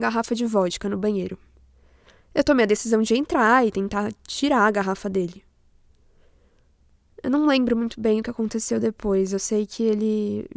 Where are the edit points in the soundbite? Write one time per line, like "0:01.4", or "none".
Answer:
none